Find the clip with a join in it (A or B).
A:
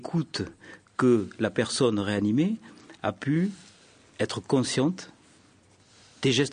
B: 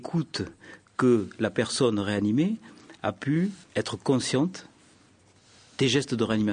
B